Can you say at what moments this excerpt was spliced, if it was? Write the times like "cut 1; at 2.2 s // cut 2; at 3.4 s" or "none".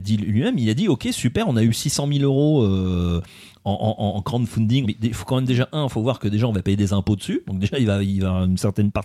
cut 1; at 4.8 s